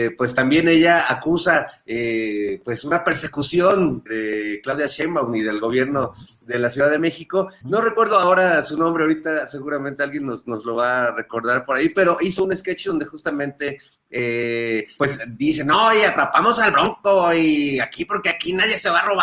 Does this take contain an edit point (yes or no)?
yes